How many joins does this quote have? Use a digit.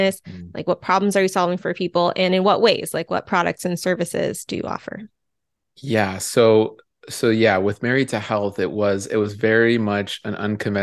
0